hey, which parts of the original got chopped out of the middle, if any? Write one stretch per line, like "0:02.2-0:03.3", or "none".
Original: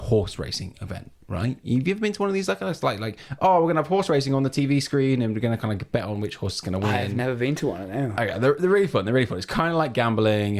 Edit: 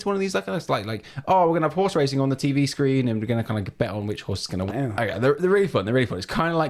0:06.8-0:07.9

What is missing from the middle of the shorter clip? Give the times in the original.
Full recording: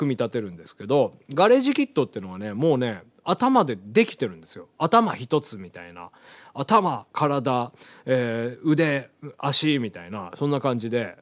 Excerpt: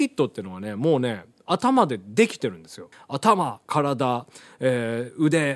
0:04.7-0:06.4

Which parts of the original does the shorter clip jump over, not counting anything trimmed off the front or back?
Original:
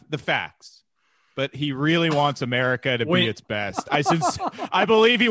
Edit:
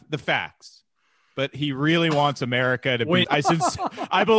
0:03.2-0:03.8

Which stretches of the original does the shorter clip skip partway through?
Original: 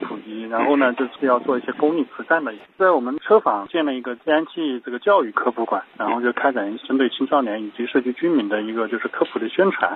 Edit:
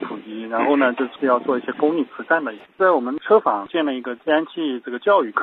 none

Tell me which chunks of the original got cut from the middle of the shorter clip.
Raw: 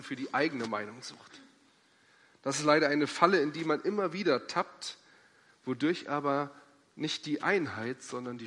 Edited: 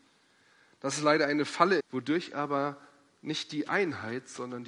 0:03.4-0:05.5

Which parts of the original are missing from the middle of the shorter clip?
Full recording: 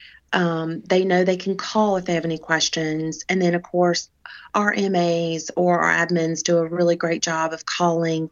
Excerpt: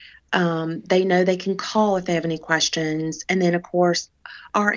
none

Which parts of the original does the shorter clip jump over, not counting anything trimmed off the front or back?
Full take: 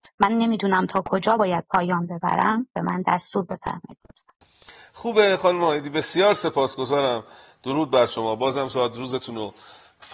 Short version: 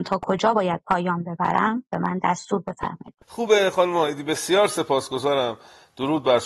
0:04.1-0:04.9

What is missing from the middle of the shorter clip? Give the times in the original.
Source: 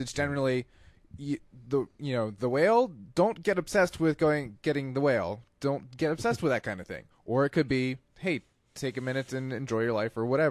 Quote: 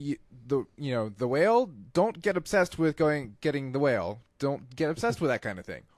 none

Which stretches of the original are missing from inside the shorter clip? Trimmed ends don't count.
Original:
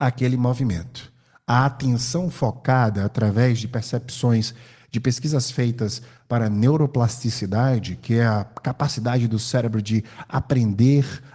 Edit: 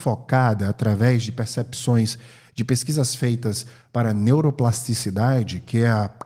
none

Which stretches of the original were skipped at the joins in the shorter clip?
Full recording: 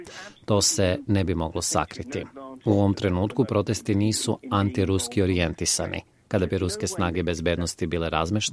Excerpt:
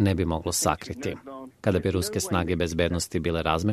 0:02.6-0:06.2

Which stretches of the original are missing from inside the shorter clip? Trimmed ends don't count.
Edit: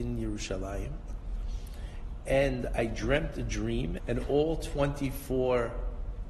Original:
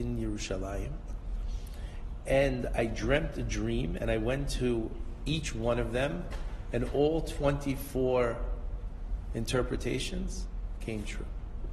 0:04.0-0:06.6

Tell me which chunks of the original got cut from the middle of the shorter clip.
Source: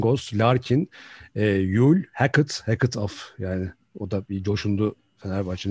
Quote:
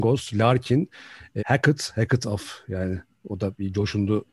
0:01.4-0:02.1

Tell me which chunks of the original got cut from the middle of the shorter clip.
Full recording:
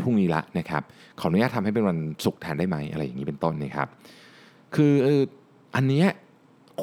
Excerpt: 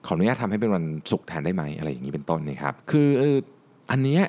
0:03.9-0:04.7

